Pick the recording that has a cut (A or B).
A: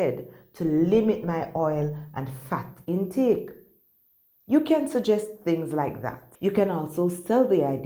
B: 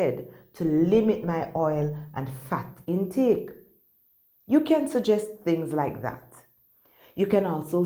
A